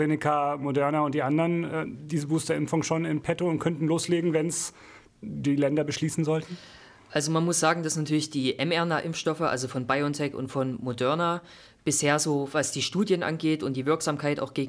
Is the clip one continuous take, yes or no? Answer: yes